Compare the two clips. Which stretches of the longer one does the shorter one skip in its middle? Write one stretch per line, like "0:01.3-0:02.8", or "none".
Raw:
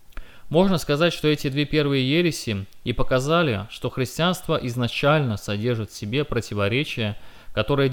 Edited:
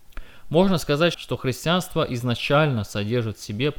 0:01.1-0:03.7